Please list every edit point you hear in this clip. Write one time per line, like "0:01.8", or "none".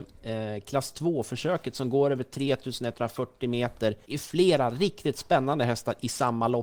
none